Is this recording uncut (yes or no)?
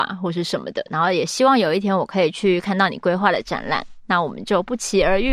yes